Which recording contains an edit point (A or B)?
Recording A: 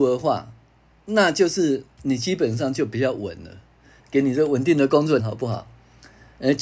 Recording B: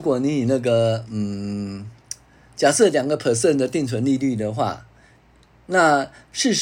A